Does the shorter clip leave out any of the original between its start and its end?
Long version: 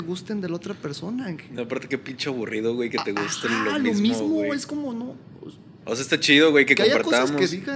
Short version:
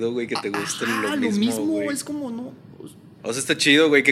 no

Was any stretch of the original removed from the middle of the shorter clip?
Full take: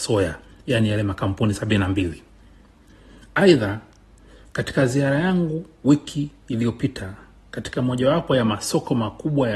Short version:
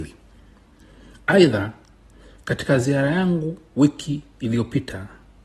no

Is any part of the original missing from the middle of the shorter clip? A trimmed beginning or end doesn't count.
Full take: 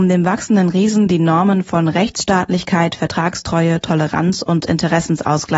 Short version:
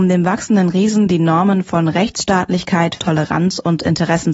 yes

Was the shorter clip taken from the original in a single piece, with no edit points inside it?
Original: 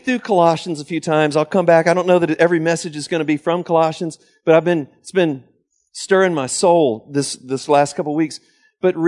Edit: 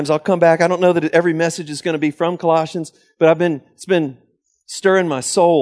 yes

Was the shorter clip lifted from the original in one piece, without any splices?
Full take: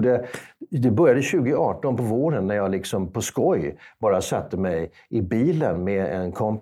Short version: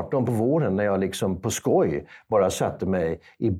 yes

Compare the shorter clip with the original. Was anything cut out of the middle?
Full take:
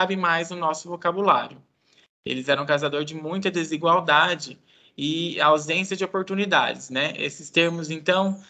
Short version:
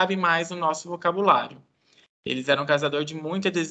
no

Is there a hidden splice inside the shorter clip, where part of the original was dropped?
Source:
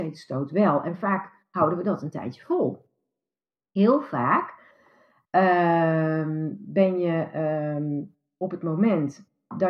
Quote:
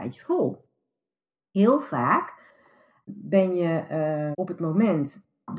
yes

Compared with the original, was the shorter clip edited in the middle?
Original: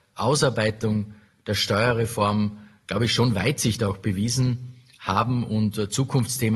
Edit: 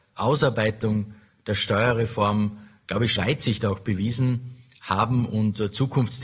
yes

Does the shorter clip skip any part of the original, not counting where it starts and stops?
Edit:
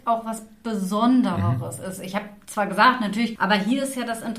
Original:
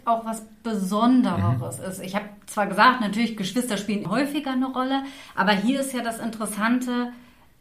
yes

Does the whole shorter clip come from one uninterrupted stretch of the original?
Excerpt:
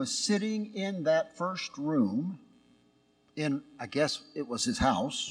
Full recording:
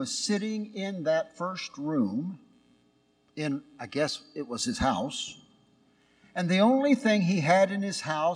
yes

